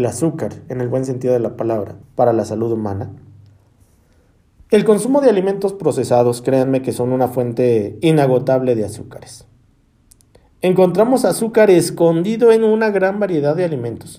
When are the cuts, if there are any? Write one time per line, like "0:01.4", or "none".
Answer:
0:02.0